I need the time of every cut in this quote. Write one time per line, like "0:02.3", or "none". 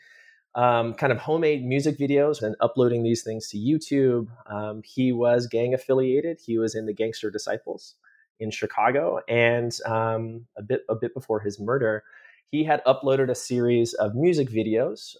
0:02.4
0:10.5